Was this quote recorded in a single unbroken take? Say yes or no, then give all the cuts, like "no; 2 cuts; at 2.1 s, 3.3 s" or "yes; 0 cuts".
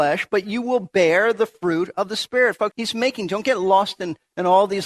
no; 1 cut; at 2.7 s